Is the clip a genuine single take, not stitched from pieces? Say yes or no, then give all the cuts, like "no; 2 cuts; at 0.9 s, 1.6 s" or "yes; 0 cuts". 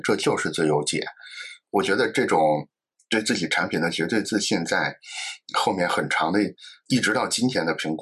yes; 0 cuts